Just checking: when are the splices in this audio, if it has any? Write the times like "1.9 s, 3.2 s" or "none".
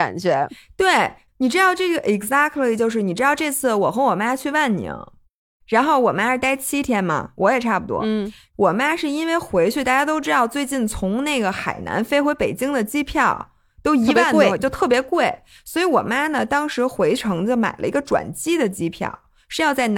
none